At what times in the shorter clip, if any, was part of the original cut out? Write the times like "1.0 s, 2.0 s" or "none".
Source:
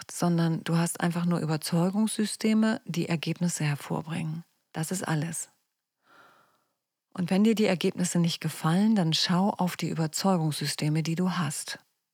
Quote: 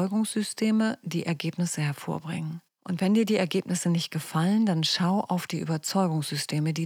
2.7 s